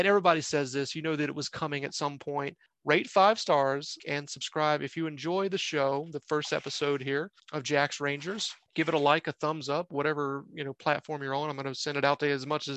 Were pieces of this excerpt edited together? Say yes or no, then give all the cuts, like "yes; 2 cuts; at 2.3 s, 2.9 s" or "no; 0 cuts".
yes; 1 cut; at 4.0 s